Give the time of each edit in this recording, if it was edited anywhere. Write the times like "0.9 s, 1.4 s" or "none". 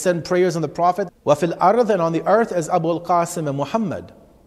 1.1 s